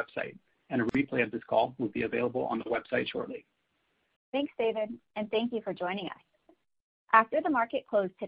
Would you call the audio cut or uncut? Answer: cut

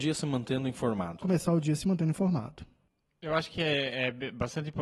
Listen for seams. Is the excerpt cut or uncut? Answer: uncut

